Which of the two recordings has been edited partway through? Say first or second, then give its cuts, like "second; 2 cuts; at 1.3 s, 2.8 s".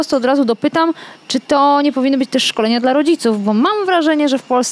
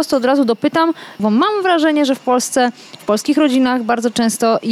second; 1 cut; at 1.2 s